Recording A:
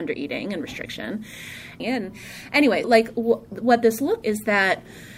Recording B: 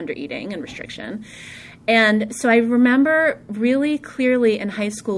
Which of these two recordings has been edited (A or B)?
A